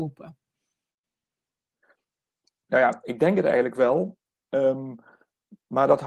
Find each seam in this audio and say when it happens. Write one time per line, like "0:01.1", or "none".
none